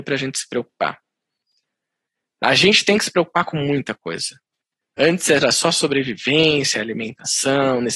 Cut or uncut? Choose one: uncut